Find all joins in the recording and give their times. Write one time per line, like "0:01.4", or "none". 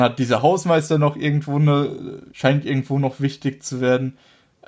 0:02.3